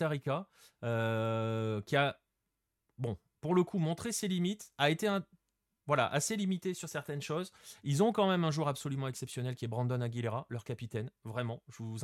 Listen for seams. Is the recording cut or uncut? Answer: uncut